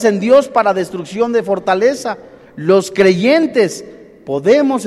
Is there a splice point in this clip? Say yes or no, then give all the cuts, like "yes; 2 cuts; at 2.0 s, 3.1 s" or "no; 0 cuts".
no; 0 cuts